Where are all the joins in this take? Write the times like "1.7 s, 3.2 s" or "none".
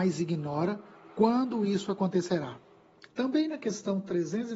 3.1 s